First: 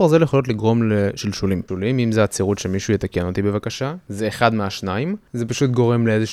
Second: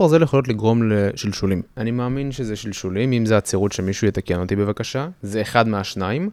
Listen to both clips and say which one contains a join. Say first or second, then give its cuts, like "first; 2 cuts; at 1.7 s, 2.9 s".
first; 1 cut; at 1.7 s